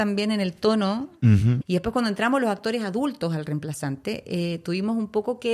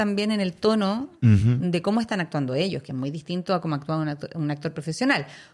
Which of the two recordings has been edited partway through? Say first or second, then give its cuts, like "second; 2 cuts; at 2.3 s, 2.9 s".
first; 1 cut; at 1.6 s